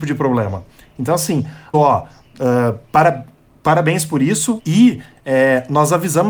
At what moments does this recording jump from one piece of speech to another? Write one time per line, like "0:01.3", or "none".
0:01.7
0:04.6